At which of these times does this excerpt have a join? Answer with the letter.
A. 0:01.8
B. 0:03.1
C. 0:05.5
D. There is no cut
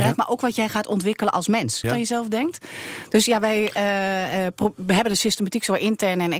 A